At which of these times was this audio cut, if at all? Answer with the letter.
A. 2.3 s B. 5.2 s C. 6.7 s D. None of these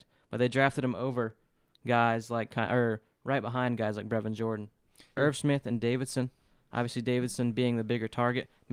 B